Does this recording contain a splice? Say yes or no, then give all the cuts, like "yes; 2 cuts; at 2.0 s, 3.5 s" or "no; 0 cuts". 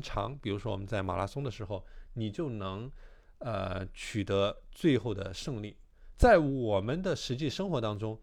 yes; 1 cut; at 6.1 s